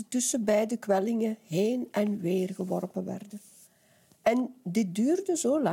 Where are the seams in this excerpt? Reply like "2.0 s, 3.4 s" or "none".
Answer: none